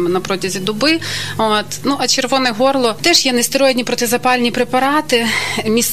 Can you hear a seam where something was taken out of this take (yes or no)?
no